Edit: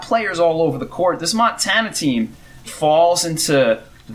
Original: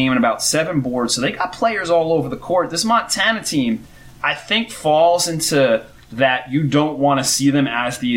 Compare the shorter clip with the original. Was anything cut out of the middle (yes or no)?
yes